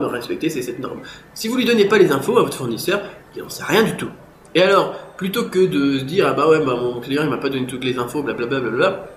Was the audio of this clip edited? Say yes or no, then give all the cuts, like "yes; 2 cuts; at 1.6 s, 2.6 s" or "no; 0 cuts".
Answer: no; 0 cuts